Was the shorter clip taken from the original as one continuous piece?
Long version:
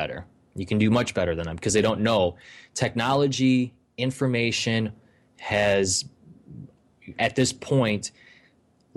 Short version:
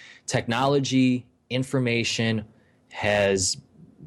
yes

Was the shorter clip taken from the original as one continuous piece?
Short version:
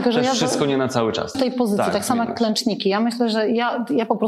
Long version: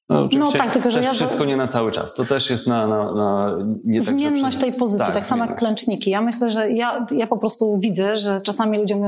no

